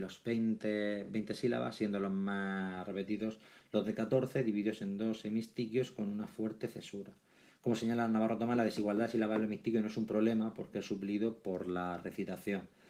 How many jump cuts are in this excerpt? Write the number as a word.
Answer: zero